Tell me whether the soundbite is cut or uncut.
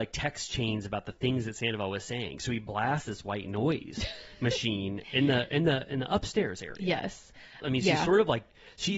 cut